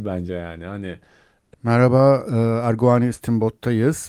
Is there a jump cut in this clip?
yes; 1 cut; at 1.5 s

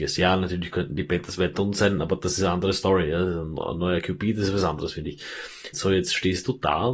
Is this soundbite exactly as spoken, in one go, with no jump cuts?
no; 1 cut; at 5.7 s

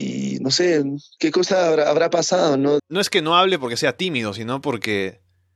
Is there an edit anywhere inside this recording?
yes; 1 cut; at 2.8 s

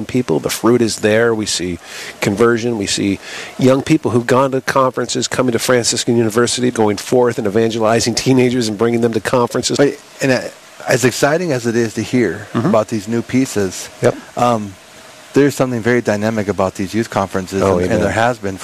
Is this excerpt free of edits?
no; 2 cuts; at 6.7 s, 9.8 s

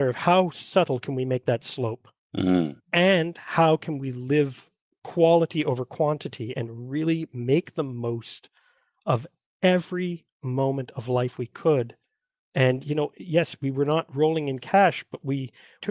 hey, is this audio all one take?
yes; 0 cuts

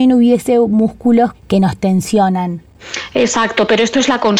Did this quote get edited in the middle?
yes; 1 cut; at 1.3 s

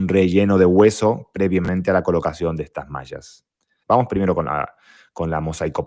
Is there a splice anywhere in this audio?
yes; 1 cut; at 3.8 s

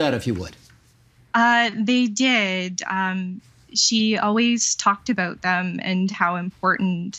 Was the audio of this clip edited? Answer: no; 0 cuts

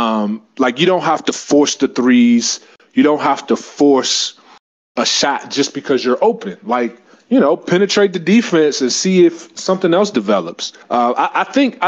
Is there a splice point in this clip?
yes; 1 cut; at 10.8 s

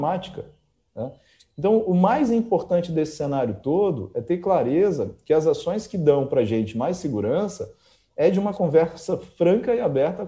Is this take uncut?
yes; 0 cuts

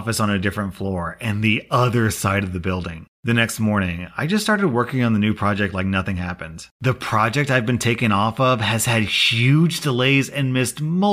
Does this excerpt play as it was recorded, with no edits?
no; 1 cut; at 6.7 s

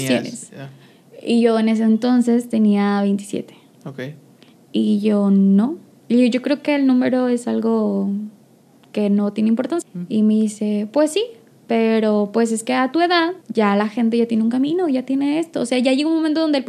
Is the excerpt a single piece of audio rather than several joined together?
no; 2 cuts; at 9.8 s, 13.4 s

